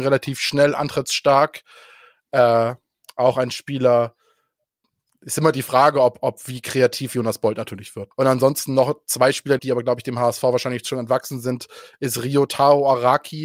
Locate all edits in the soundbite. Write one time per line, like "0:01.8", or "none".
0:08.1
0:09.6